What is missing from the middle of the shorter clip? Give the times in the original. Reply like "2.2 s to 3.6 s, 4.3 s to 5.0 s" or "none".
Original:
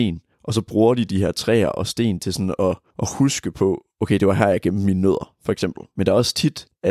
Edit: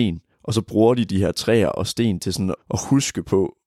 2.6 s to 2.8 s